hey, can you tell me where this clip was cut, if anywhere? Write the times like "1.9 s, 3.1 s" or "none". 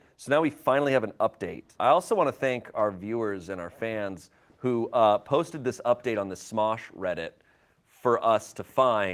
none